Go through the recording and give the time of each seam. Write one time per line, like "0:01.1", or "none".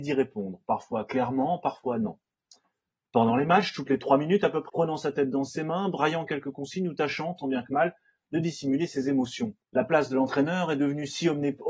0:04.7
0:09.6

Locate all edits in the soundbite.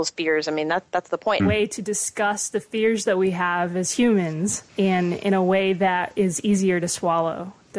0:01.4
0:04.7

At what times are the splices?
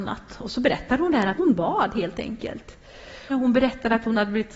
0:01.4
0:03.3

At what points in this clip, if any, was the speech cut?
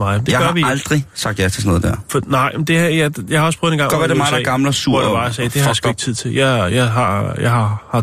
none

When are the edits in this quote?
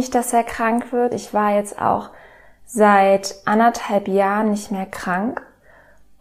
none

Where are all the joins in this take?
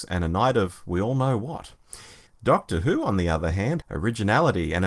0:02.3
0:03.8

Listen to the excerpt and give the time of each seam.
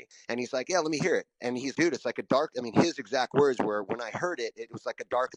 0:01.7

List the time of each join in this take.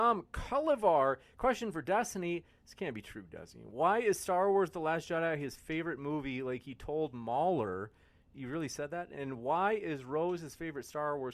0:08.3

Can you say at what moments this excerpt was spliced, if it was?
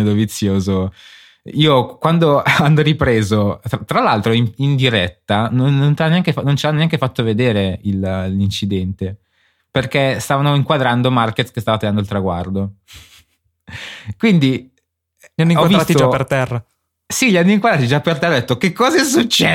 none

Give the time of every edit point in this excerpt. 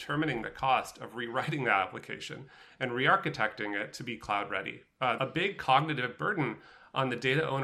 0:05.2

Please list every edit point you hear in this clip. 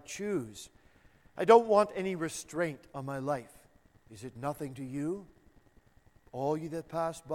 0:03.9

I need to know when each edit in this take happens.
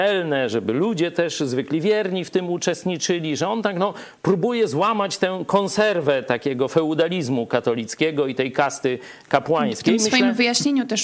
none

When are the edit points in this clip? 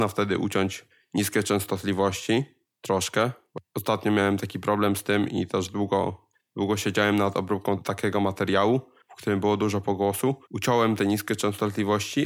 0:10.4

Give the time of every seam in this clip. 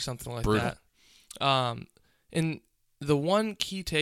none

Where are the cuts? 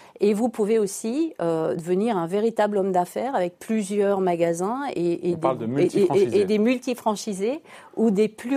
none

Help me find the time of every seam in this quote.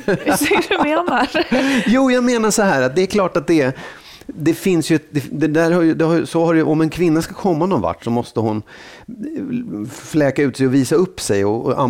none

